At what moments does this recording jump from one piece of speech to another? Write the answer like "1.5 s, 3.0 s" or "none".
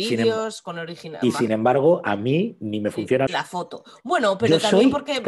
1.5 s, 3.3 s